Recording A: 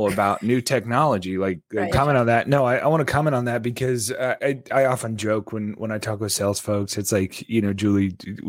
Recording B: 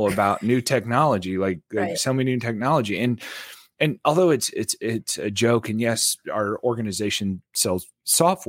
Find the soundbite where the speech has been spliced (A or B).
A